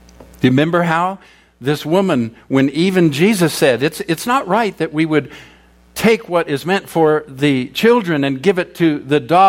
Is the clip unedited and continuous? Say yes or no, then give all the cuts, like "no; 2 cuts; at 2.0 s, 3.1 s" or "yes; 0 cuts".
yes; 0 cuts